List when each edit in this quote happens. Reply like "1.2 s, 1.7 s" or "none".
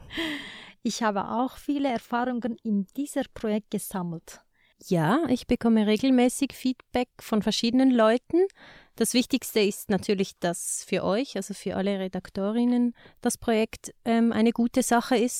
4.7 s